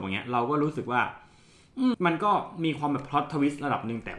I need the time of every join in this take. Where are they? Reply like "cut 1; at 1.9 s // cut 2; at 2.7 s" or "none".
cut 1; at 1.9 s